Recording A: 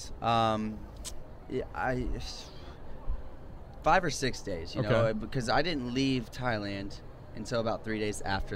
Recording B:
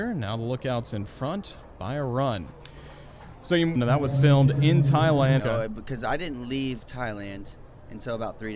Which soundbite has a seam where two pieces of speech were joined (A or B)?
B